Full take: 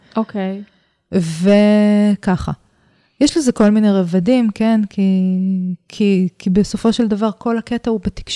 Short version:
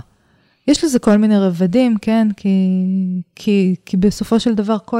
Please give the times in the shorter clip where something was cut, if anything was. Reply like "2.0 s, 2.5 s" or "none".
none

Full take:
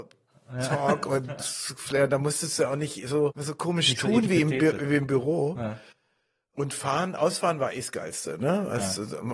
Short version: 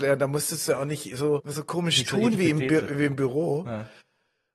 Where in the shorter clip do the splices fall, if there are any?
none

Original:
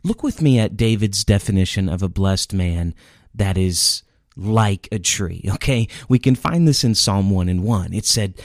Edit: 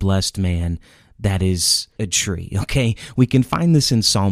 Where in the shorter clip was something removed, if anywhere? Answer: 2.0 s

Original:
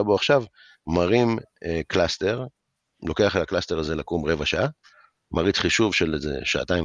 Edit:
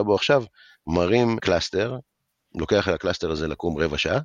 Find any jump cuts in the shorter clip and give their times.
1.4 s

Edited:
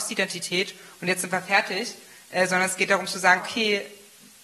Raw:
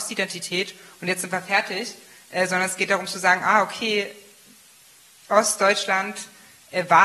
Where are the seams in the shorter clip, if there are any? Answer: 3.4 s

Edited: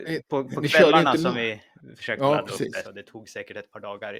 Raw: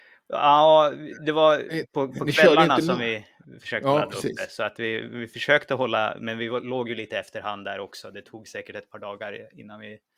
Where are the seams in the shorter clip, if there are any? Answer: 2.8 s

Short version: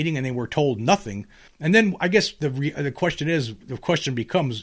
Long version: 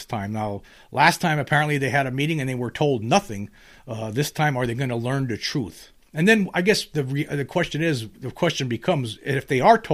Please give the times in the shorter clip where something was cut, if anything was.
1.5 s

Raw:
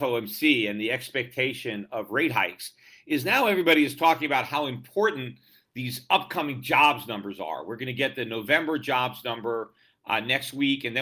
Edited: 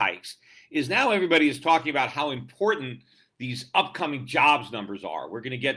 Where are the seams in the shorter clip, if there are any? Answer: none

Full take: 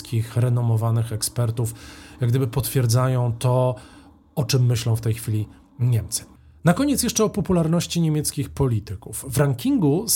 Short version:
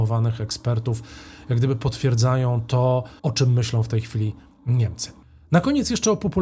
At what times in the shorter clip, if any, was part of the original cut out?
3.2 s

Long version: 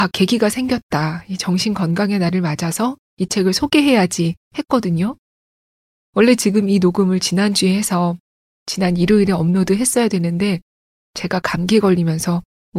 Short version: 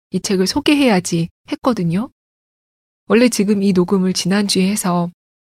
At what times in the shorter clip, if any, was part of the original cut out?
none

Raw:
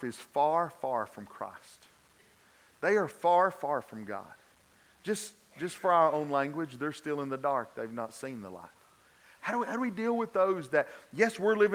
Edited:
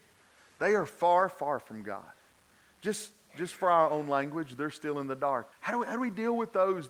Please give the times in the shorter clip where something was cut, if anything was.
5.5 s

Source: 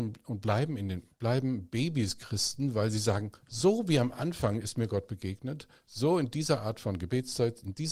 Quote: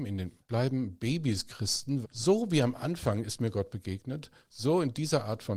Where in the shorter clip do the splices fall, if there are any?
2.0 s

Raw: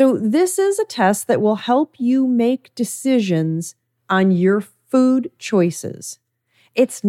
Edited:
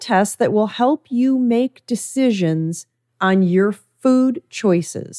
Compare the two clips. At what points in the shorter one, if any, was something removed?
none

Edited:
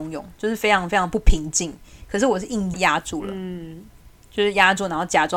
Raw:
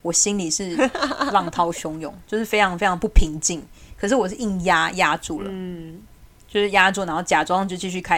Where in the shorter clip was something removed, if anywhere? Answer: 2.7 s

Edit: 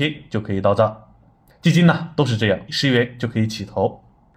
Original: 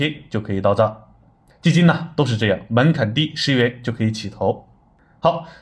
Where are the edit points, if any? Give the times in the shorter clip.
2.7 s

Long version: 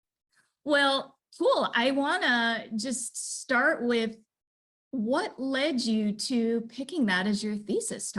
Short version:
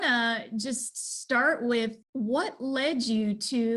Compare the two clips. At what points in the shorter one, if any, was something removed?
2.0 s

